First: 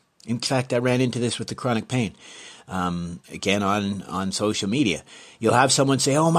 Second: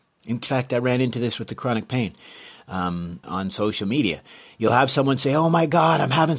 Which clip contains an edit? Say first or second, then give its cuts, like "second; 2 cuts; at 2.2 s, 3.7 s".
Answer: second; 1 cut; at 3.2 s